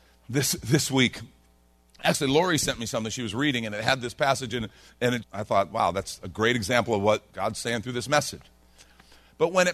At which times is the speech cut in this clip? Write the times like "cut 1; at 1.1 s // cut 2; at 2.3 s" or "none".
cut 1; at 5.2 s // cut 2; at 7.3 s